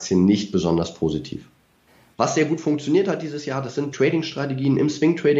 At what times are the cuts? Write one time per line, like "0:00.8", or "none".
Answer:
0:02.1
0:03.9